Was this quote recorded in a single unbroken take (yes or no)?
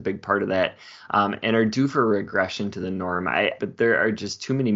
no